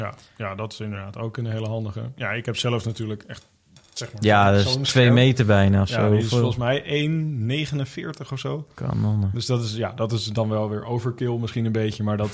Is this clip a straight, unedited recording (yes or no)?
yes